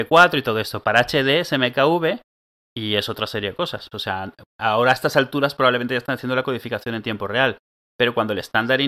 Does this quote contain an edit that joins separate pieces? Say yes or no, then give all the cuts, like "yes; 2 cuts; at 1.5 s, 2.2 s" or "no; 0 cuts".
yes; 1 cut; at 3.9 s